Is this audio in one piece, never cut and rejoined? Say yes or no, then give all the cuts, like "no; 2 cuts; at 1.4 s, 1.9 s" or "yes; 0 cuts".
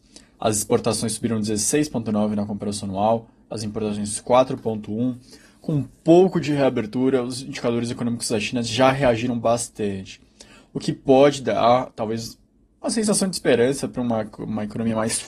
yes; 0 cuts